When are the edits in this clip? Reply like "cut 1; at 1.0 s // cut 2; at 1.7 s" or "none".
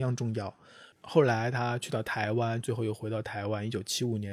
cut 1; at 0.9 s // cut 2; at 2.6 s

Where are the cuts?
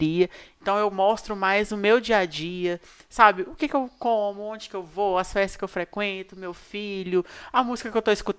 none

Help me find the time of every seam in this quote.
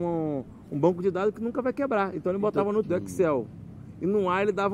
cut 1; at 2.8 s

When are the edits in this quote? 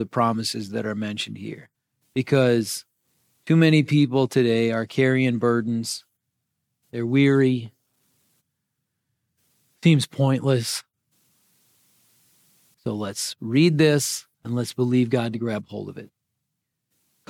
cut 1; at 12.7 s // cut 2; at 14.3 s

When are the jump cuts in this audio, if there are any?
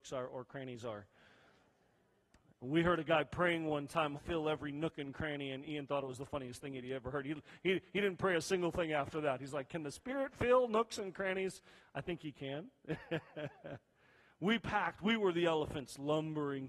cut 1; at 4.2 s

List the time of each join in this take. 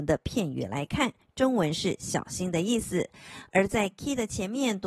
none

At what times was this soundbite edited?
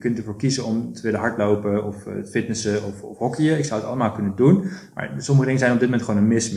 none

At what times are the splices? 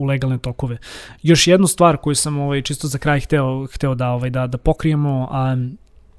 none

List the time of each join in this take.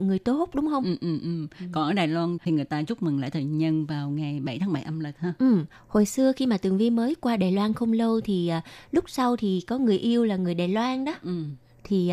none

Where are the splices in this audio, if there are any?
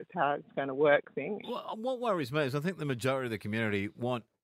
cut 1; at 1.4 s

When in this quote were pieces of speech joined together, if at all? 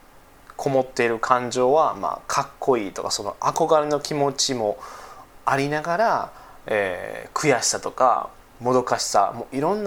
none

